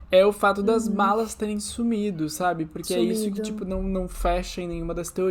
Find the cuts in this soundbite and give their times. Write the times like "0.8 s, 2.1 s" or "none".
none